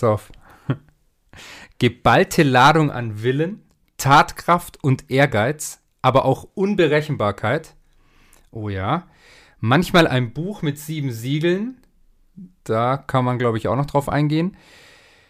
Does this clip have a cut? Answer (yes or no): no